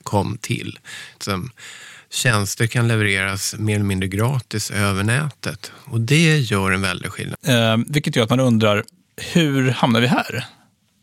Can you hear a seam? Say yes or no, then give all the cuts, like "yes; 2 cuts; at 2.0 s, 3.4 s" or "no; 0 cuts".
yes; 2 cuts; at 1.2 s, 7.3 s